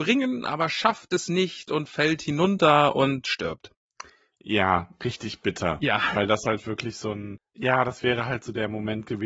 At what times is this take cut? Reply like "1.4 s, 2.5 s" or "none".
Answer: none